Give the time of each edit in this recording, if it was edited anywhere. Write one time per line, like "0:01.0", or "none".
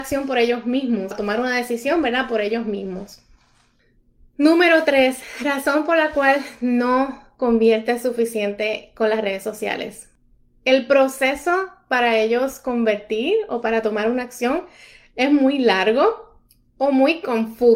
0:01.1

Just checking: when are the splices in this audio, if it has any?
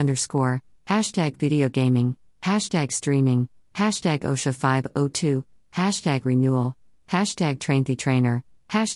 none

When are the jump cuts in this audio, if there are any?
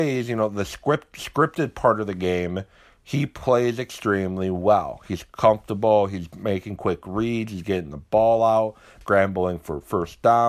0:09.0

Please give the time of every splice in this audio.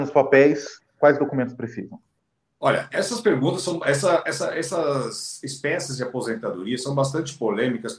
none

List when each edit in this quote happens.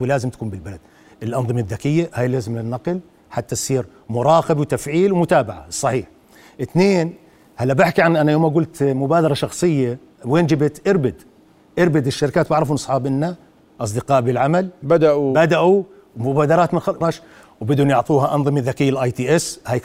0:17.0

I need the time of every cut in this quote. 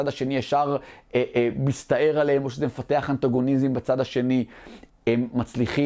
0:04.9

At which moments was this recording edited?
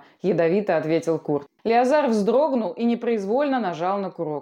0:01.6

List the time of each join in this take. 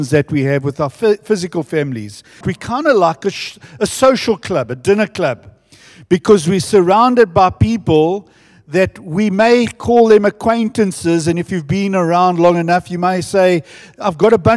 0:02.4

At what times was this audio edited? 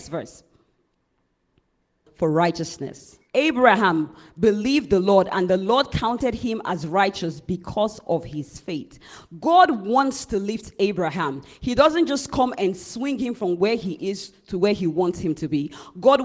0:02.1
0:03.3

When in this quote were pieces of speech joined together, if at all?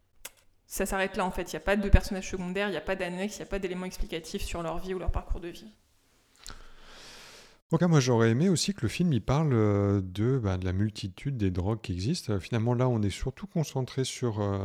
0:07.8

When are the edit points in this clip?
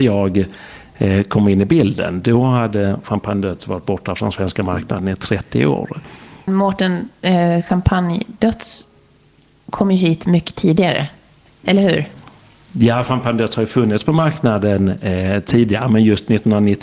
0:06.5

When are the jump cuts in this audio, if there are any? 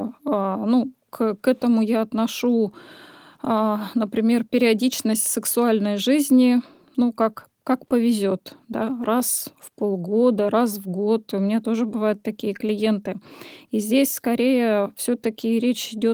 none

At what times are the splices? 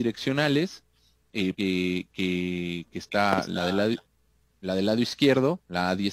0:01.5

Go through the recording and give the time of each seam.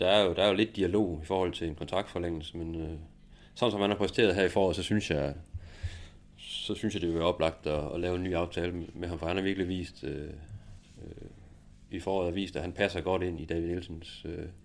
0:11.9
0:13.4

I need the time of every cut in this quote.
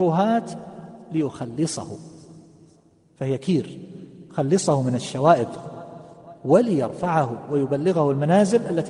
none

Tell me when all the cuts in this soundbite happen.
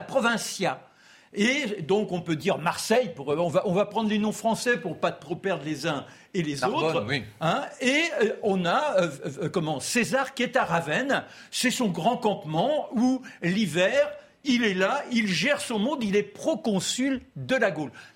none

